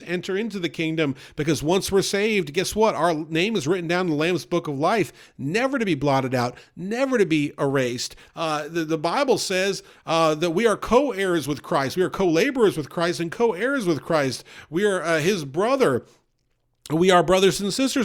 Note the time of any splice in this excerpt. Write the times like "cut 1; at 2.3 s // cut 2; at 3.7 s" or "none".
cut 1; at 8.3 s